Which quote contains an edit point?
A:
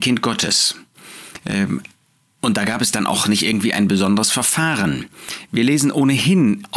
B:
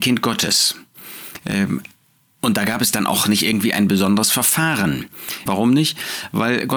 B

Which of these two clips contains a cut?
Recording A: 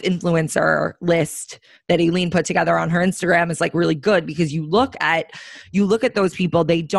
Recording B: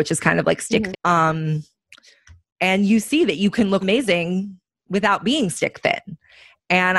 B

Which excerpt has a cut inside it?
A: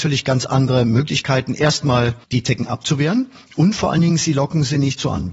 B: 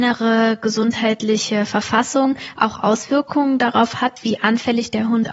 A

